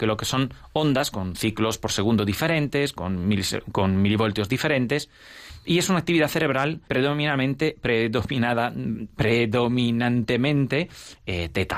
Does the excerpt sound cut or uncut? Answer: cut